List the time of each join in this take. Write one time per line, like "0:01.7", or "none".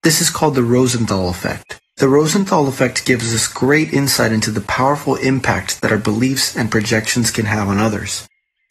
0:01.9